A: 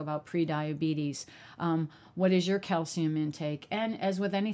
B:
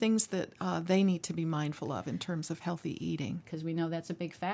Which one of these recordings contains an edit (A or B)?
B